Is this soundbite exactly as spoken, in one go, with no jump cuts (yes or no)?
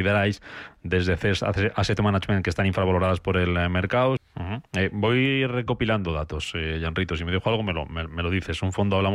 no